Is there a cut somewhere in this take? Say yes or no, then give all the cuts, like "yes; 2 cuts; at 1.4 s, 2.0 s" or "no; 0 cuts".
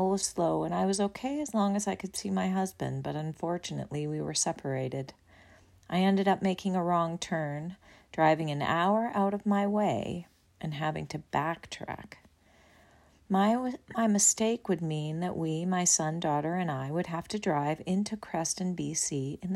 no; 0 cuts